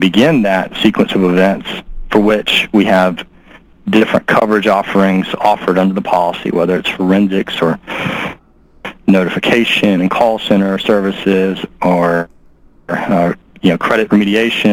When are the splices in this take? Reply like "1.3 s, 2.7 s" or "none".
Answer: none